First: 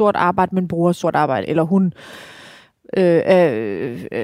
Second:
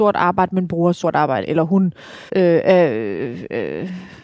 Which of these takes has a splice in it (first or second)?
second